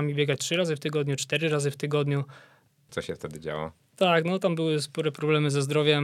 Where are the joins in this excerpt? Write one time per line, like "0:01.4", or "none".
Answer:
0:02.9